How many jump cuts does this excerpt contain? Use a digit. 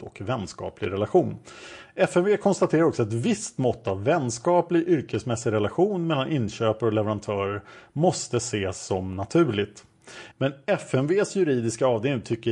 2